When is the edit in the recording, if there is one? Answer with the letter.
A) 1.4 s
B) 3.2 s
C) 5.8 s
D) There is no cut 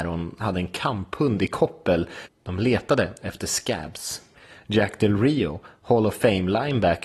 B